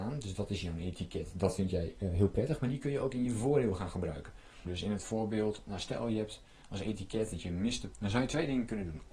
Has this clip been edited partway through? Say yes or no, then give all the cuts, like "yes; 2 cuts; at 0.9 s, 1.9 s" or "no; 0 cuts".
yes; 2 cuts; at 4.6 s, 7.9 s